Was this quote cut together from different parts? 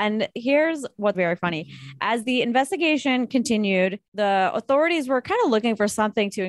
yes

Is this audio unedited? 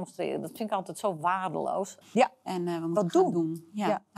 no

